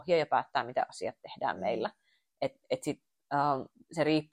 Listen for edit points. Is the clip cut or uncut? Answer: uncut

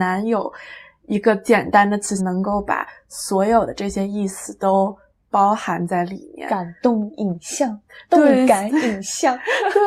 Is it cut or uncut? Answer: cut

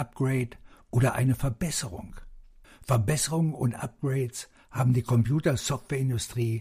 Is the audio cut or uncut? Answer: cut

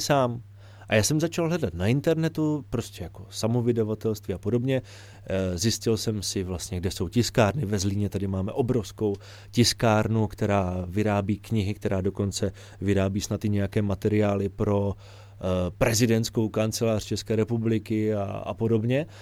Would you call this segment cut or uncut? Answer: uncut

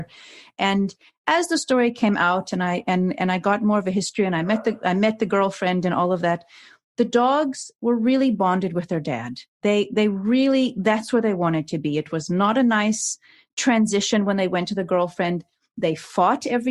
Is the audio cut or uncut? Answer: uncut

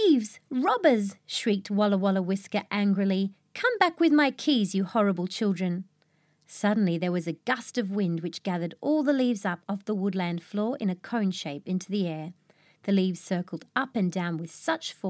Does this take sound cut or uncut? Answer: uncut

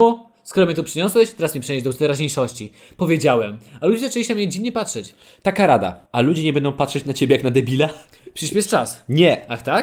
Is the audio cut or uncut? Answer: cut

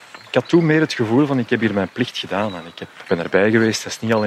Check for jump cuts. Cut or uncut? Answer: cut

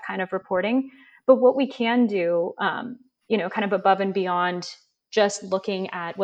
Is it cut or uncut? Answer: uncut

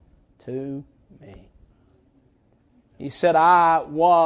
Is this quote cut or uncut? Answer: uncut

